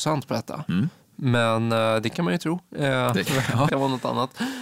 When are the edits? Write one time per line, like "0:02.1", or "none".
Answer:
0:03.7